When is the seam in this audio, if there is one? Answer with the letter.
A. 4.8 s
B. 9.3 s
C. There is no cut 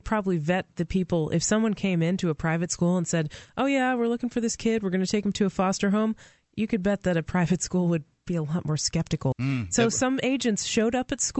B